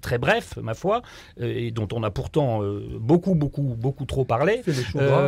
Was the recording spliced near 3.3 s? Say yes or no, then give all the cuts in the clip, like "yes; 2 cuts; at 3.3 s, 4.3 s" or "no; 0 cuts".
no; 0 cuts